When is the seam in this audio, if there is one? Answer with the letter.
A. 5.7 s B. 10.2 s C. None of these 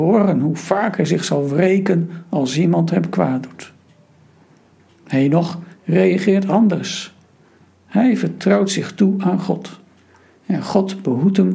A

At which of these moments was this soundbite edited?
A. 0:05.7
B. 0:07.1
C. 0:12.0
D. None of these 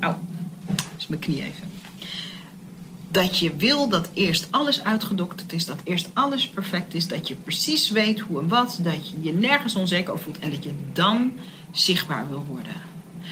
D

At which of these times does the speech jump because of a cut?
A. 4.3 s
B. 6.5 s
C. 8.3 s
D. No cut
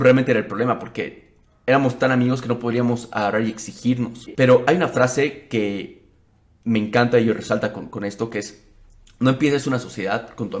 A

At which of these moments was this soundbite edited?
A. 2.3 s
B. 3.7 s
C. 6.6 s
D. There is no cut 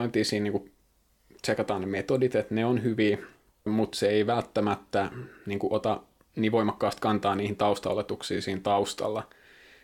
B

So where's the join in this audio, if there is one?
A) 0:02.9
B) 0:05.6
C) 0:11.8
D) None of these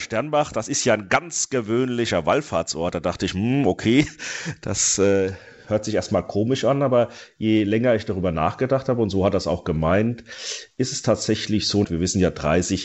C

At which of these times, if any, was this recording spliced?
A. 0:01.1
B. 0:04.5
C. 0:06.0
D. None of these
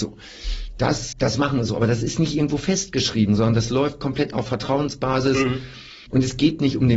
A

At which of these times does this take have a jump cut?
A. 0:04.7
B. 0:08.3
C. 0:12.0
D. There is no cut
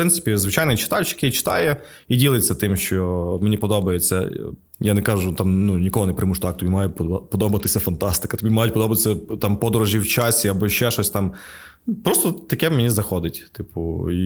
A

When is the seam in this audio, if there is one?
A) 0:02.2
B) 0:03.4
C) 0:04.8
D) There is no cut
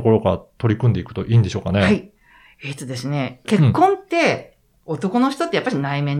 B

